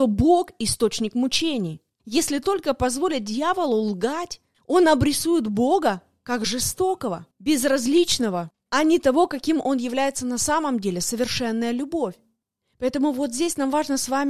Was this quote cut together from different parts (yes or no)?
yes